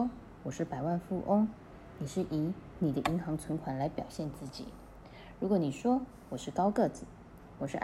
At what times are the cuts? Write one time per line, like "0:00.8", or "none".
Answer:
none